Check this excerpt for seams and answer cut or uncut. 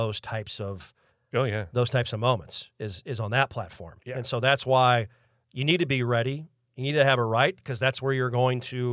uncut